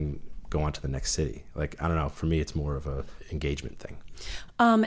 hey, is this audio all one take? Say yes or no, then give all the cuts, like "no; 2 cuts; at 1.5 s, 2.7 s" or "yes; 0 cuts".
yes; 0 cuts